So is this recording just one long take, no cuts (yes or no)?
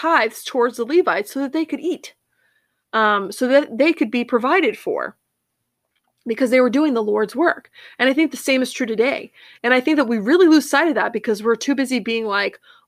yes